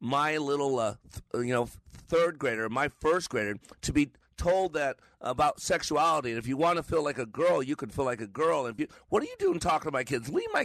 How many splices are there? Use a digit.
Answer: 0